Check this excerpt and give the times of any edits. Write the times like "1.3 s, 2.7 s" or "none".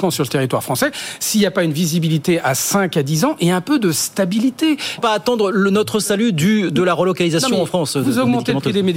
5.0 s